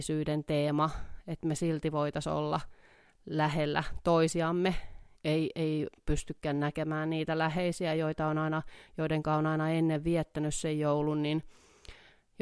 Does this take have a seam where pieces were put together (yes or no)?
yes